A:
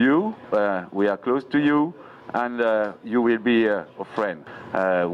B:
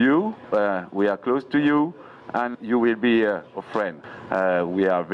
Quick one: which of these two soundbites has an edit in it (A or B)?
B